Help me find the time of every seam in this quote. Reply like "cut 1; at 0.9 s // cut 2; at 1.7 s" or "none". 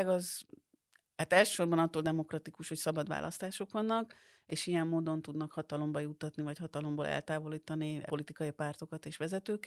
cut 1; at 8.1 s